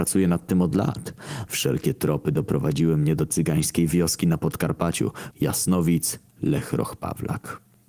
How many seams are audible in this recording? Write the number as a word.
two